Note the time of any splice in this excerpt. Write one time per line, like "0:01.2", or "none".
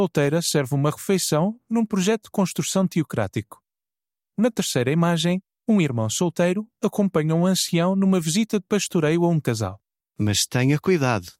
0:10.0